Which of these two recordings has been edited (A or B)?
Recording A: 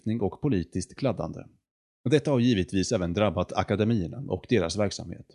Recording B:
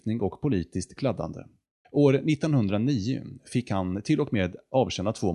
B